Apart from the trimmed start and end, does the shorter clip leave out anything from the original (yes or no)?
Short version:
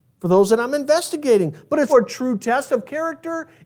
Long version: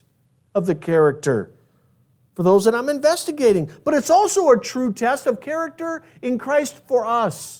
yes